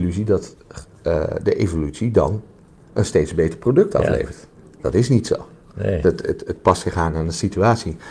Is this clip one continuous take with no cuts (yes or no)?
yes